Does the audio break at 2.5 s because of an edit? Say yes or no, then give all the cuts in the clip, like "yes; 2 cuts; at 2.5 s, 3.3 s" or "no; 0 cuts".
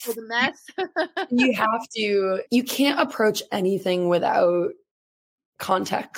yes; 1 cut; at 2.5 s